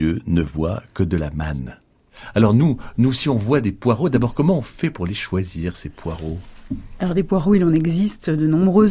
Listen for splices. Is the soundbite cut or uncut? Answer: uncut